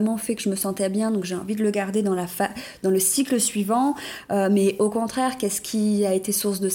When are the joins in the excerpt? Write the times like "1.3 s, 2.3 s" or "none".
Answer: none